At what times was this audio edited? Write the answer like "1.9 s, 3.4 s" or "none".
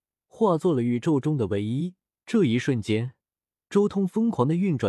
2.1 s